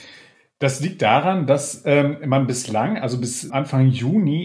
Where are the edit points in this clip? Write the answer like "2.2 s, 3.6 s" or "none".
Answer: 3.5 s